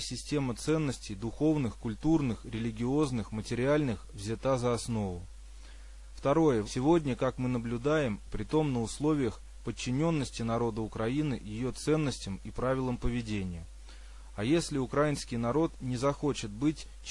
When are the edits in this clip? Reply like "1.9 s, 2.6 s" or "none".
6.6 s, 8.3 s